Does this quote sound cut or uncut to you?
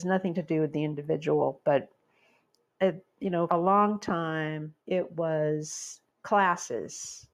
cut